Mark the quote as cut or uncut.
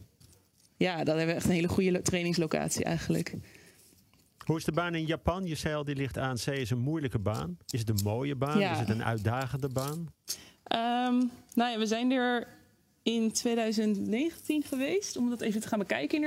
cut